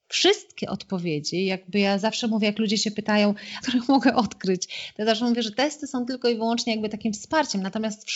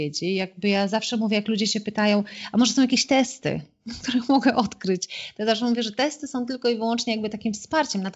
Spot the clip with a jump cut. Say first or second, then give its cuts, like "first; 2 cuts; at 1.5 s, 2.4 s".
first; 1 cut; at 3.6 s